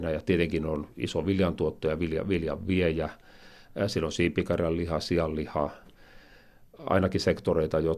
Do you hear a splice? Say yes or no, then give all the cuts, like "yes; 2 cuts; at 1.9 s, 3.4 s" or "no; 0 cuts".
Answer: no; 0 cuts